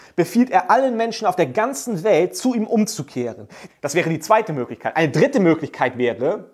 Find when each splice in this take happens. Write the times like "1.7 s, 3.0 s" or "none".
3.7 s